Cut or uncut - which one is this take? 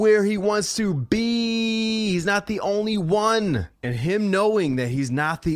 cut